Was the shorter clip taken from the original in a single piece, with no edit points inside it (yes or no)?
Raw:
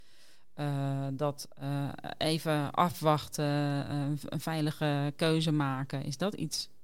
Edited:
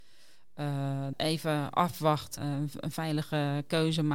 no